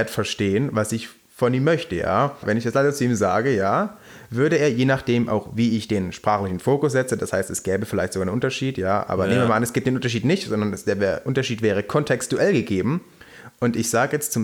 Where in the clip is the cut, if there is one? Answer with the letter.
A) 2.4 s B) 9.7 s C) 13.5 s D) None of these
A